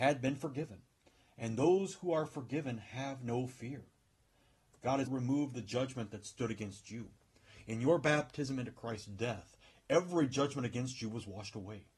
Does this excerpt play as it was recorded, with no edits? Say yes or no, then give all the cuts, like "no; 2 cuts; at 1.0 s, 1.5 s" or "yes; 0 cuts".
no; 1 cut; at 5.1 s